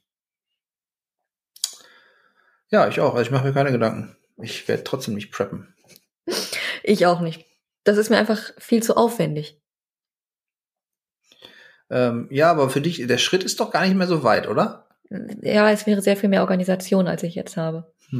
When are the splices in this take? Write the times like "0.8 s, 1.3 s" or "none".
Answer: none